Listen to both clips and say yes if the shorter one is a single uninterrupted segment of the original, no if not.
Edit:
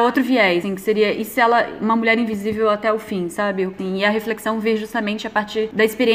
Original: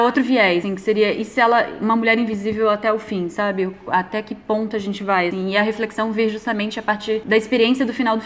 no